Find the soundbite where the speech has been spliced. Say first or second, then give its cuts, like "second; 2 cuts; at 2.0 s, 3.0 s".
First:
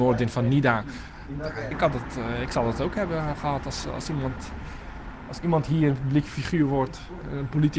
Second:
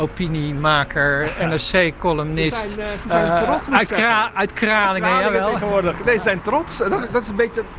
first; 1 cut; at 1.7 s